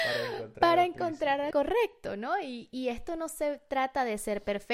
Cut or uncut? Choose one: cut